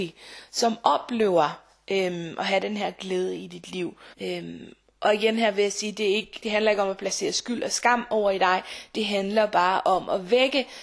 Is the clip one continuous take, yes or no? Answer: no